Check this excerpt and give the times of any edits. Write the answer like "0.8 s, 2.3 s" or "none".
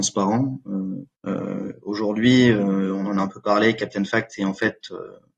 1.2 s